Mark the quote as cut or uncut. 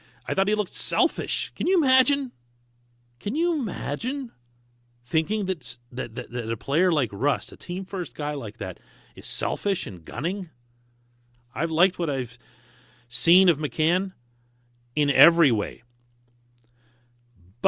cut